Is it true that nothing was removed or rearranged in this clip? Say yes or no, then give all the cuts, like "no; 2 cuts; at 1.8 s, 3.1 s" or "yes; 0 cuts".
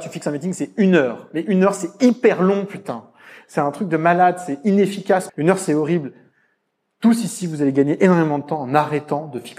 no; 1 cut; at 5.3 s